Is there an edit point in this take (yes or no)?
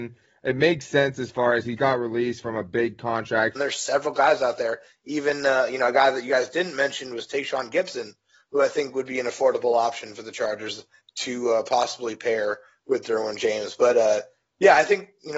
yes